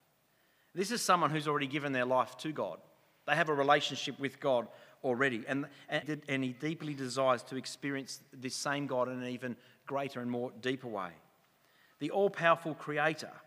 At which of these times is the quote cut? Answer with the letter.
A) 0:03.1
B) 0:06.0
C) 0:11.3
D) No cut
B